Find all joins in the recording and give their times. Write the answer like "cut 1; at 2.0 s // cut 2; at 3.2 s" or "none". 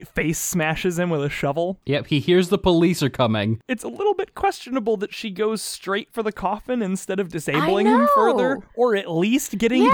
none